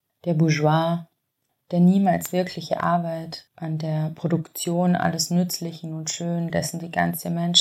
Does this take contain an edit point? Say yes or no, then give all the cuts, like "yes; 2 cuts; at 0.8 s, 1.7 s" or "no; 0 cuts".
no; 0 cuts